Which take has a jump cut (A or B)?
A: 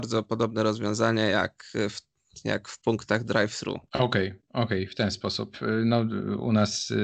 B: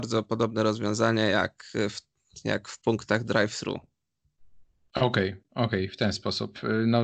A